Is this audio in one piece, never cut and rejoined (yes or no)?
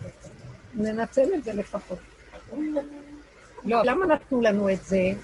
no